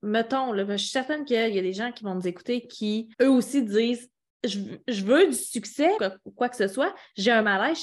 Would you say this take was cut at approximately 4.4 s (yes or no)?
no